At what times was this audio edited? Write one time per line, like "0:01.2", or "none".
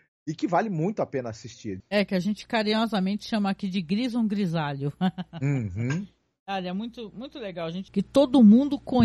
0:01.8
0:07.9